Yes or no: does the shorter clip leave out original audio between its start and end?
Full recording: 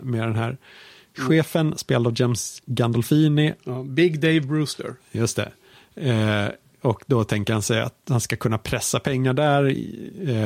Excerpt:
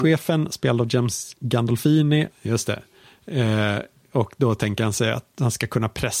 yes